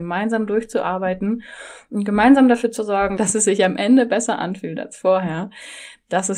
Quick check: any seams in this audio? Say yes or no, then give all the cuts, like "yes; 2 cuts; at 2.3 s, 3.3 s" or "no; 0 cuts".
no; 0 cuts